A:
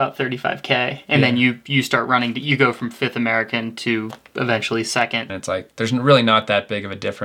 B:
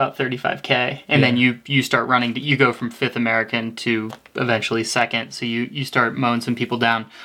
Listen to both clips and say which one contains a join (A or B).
A